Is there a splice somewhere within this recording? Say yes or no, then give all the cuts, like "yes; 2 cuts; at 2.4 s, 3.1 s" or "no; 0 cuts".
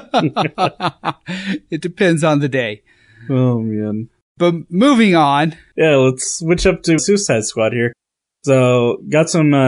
yes; 1 cut; at 7.0 s